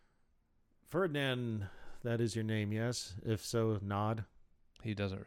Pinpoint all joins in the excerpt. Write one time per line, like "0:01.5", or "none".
none